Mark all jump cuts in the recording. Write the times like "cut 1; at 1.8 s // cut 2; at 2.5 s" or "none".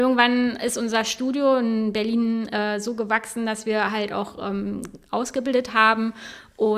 none